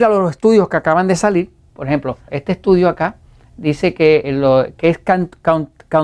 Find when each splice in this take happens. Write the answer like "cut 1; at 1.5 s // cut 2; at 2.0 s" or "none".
cut 1; at 2.3 s // cut 2; at 4.2 s